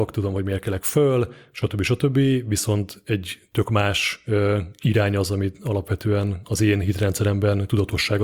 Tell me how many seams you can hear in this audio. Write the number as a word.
zero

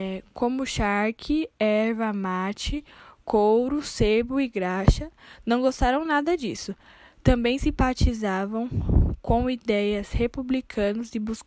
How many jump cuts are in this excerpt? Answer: zero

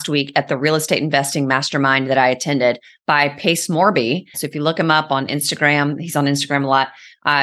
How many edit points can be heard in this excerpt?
one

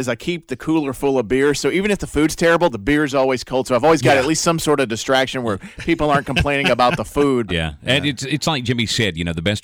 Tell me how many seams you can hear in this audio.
one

